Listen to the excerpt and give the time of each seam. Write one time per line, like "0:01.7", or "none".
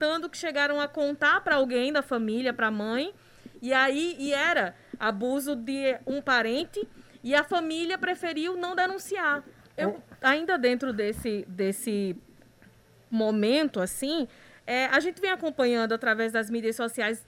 0:09.6